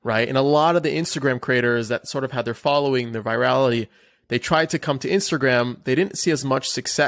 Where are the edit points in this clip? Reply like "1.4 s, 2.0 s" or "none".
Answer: none